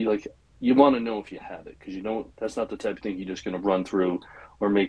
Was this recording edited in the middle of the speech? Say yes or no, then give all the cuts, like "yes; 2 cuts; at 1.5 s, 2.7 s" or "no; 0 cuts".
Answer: no; 0 cuts